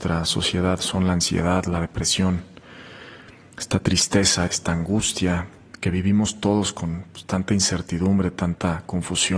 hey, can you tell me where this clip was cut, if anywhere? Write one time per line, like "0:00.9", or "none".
0:04.5